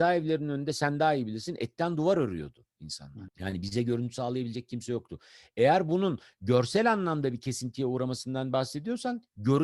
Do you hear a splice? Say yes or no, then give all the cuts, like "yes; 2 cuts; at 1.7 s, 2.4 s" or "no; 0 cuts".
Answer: yes; 1 cut; at 3.3 s